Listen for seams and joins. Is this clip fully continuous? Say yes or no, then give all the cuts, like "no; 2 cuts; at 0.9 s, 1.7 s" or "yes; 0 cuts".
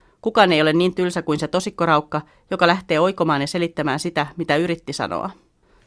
yes; 0 cuts